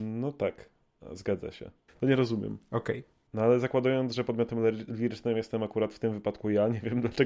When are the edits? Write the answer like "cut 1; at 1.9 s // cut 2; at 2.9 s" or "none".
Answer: cut 1; at 1.9 s // cut 2; at 3.3 s